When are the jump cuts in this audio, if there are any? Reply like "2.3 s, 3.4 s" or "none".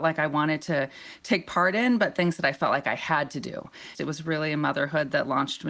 3.9 s